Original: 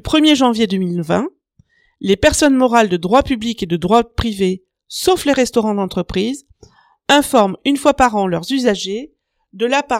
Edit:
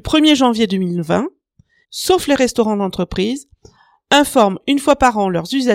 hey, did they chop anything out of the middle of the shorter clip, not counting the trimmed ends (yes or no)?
yes